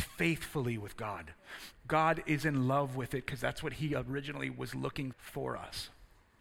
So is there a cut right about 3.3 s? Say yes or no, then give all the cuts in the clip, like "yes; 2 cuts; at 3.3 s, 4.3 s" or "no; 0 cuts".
no; 2 cuts; at 1.7 s, 5.1 s